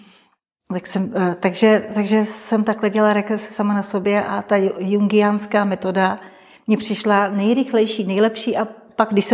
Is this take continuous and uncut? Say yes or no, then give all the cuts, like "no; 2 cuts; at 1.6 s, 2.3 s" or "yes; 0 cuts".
yes; 0 cuts